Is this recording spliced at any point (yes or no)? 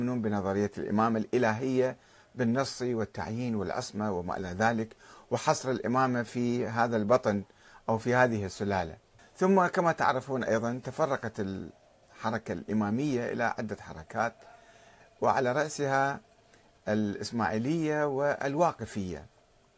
yes